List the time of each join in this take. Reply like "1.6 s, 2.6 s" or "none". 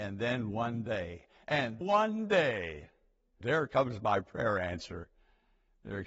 1.8 s, 3.4 s